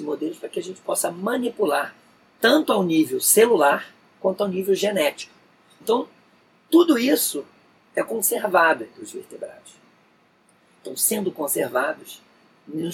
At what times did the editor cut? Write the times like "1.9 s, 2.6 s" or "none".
5.8 s